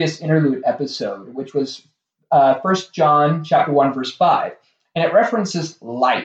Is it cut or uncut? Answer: uncut